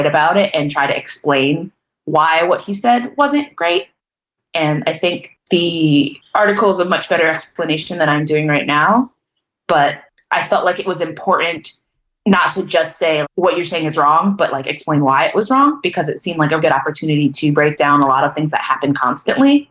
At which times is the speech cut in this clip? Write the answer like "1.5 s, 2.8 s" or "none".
13.2 s, 16.6 s